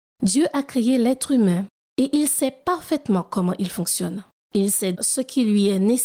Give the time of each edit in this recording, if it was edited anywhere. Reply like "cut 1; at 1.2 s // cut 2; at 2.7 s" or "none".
cut 1; at 4.9 s

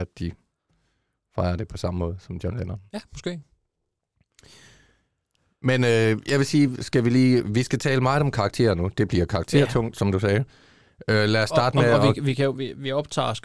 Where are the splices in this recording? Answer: none

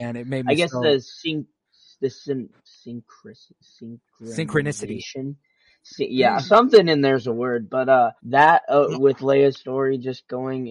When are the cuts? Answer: cut 1; at 8.2 s

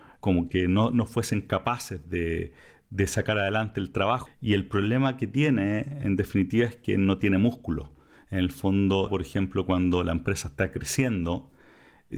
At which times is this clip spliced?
cut 1; at 4.3 s // cut 2; at 9.1 s

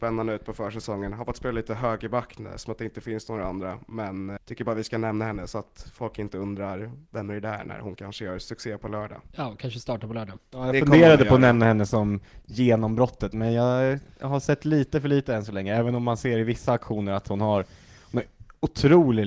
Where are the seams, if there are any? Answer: cut 1; at 4.4 s

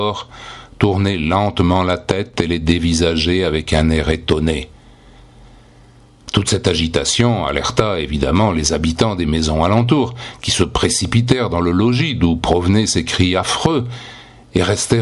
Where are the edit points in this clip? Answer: none

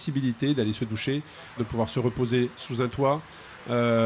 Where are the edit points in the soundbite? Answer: cut 1; at 1.6 s

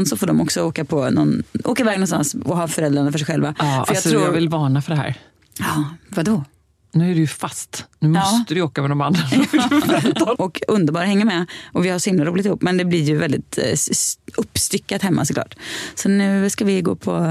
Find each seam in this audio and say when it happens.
cut 1; at 10.4 s

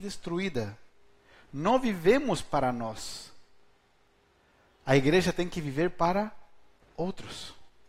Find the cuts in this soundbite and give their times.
none

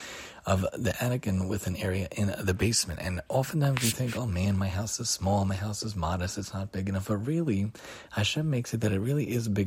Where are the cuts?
none

